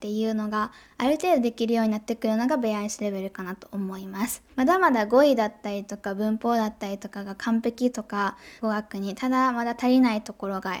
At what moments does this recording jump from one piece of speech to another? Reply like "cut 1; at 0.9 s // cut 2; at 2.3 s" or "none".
cut 1; at 4.5 s // cut 2; at 8.6 s